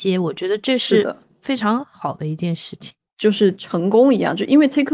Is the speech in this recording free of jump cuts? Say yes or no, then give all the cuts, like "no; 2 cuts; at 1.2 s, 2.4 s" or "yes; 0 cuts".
no; 1 cut; at 3.1 s